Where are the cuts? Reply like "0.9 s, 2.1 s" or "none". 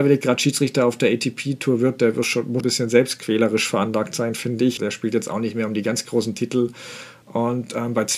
2.6 s, 4.8 s, 7.2 s